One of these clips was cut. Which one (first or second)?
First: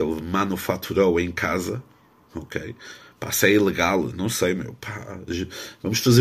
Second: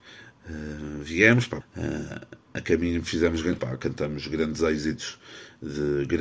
second